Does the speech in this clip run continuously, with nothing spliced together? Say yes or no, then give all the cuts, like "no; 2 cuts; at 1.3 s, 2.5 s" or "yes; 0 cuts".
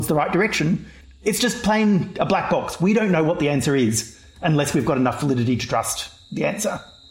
yes; 0 cuts